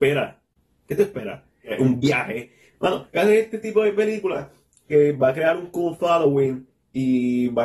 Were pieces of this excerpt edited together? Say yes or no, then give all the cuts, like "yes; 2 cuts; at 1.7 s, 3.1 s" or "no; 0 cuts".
no; 0 cuts